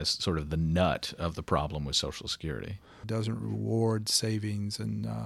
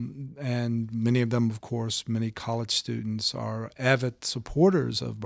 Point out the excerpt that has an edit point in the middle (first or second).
first